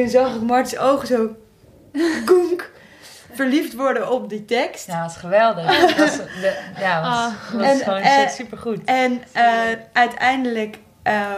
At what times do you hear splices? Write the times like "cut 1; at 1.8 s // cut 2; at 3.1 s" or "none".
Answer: none